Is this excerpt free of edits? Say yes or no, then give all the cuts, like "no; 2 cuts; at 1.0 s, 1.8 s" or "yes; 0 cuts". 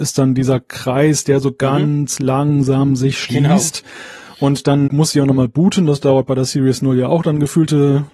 no; 1 cut; at 4.9 s